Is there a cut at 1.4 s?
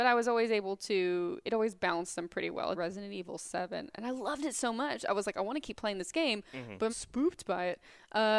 no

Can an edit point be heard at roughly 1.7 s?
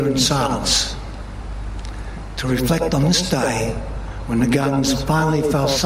no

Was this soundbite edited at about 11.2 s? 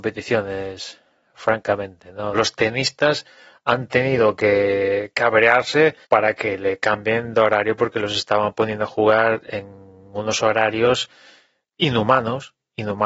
no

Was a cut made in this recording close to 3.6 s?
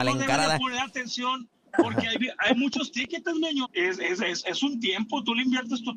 yes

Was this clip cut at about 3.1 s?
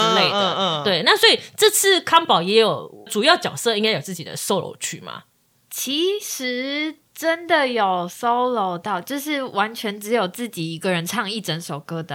yes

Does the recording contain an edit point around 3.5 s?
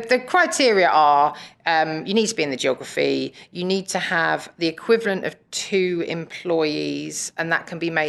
no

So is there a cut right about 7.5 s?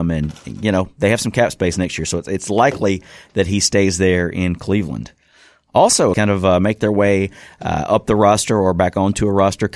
no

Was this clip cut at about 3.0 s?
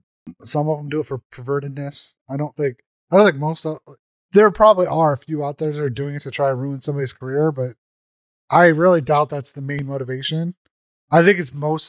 no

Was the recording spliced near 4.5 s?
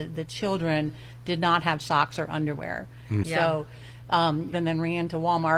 yes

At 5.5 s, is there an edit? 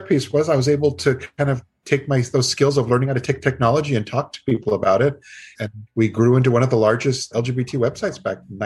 yes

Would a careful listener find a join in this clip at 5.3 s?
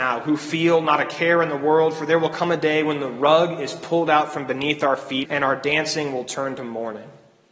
yes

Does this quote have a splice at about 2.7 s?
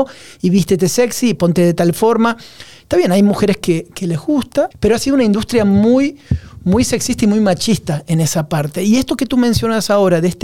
no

